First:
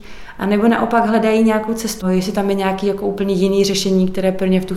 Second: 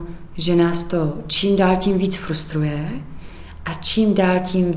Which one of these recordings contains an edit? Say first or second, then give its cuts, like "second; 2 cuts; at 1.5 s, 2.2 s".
first; 1 cut; at 2.0 s